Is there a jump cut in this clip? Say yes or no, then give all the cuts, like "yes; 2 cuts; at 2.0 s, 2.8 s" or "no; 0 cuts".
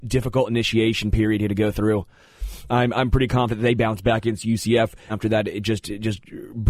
yes; 2 cuts; at 2.7 s, 5.1 s